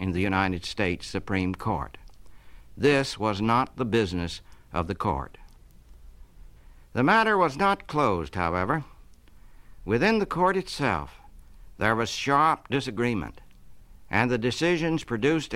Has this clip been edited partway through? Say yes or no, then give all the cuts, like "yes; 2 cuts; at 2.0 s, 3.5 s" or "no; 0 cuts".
no; 0 cuts